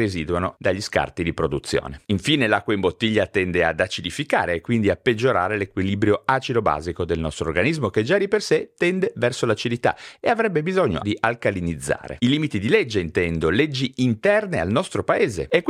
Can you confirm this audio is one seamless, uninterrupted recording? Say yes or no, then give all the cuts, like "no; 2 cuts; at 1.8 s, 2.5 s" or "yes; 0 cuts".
no; 2 cuts; at 11.0 s, 12.2 s